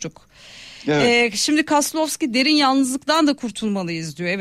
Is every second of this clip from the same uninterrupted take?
yes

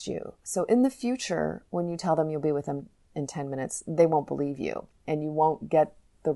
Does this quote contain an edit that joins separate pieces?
no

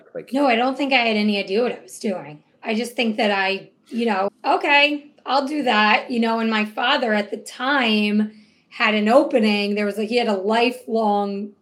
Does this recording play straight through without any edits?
no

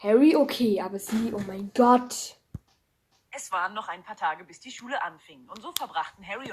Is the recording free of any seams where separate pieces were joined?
yes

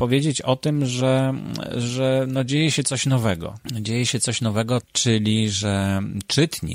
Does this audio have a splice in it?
yes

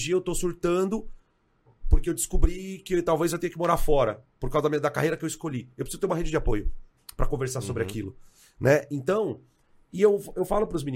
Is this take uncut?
yes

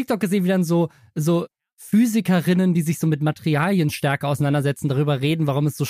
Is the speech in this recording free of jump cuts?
yes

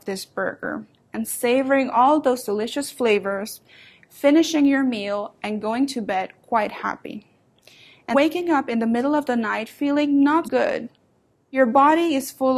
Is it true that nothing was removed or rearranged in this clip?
no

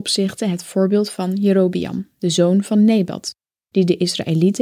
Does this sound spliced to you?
no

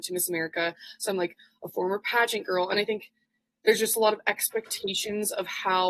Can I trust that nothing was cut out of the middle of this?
yes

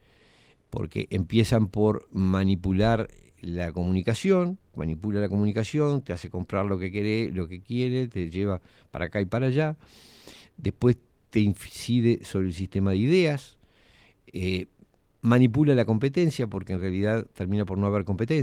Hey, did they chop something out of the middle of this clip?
yes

